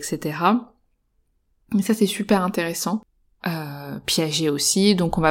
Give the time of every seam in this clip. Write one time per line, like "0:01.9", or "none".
0:03.4

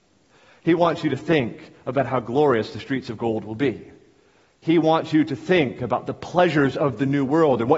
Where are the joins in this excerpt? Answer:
none

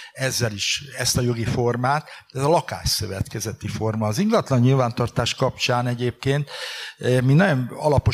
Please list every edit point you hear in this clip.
none

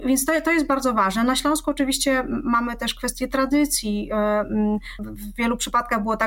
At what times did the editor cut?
0:05.0

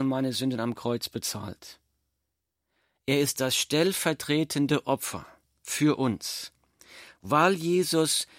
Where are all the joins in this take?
none

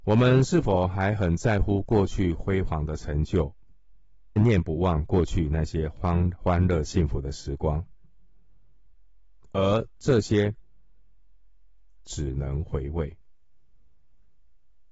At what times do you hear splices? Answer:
0:04.4
0:12.0

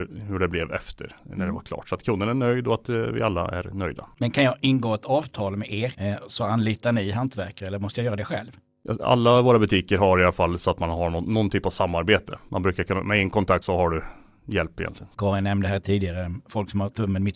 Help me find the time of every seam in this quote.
0:13.6

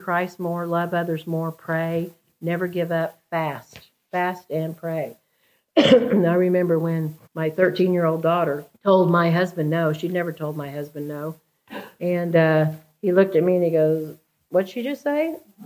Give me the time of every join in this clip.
0:07.3
0:08.7

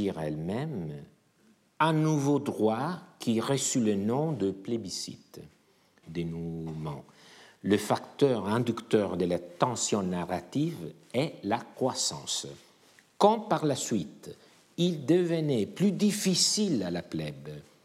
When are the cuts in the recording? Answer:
0:06.0

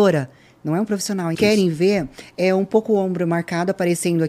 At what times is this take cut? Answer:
0:01.3

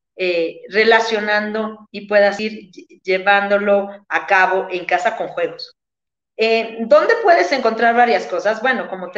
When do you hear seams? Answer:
none

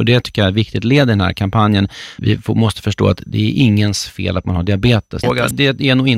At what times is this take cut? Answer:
0:02.2
0:05.2

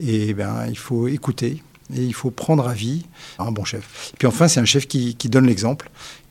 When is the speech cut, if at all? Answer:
0:03.4

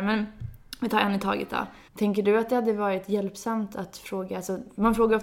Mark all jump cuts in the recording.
0:01.9

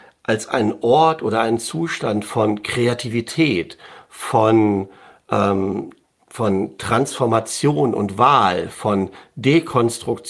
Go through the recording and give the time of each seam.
none

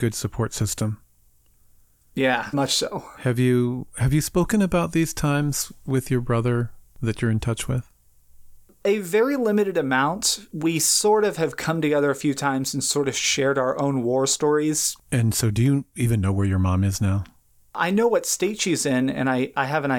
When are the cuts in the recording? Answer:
0:02.5

